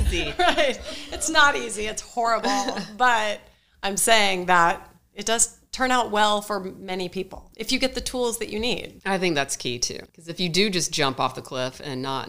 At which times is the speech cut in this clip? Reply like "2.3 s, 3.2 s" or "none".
10.1 s